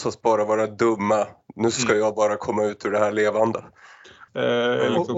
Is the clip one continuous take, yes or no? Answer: no